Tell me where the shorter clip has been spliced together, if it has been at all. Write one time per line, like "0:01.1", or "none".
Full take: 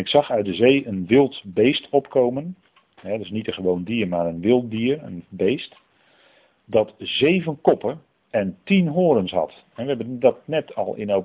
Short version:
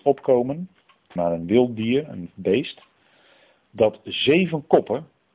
0:01.2